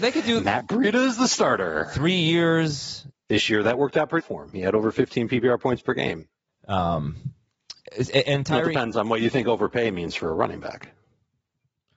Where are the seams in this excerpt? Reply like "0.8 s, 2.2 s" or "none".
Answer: 3.1 s, 4.2 s, 6.5 s